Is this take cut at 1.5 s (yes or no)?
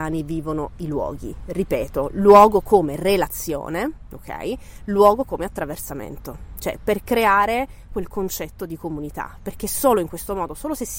no